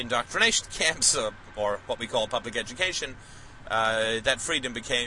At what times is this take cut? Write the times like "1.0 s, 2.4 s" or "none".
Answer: none